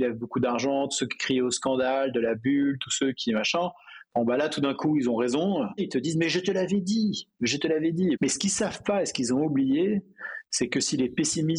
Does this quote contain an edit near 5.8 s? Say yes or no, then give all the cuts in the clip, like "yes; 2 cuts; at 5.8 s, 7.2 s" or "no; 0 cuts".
yes; 2 cuts; at 5.8 s, 8.1 s